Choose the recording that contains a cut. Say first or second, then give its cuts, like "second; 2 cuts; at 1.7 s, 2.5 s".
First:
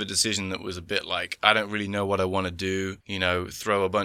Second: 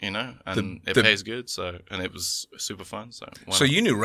first; 1 cut; at 3.0 s